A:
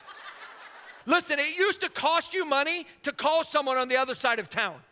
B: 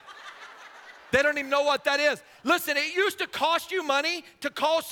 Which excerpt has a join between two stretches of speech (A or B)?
A